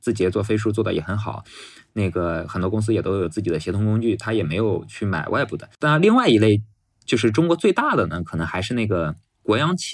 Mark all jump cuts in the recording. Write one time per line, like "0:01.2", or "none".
0:05.7